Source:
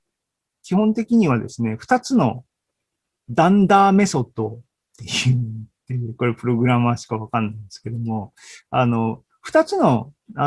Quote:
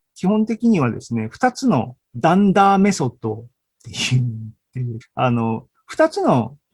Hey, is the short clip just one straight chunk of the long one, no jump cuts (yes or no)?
no